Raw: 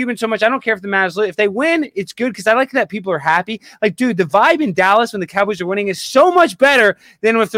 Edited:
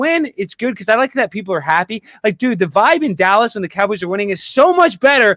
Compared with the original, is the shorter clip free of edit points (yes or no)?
yes